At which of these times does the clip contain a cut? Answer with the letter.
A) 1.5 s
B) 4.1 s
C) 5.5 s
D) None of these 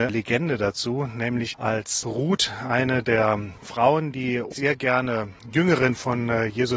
A